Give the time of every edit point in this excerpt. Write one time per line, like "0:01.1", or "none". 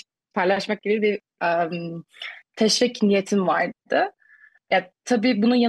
none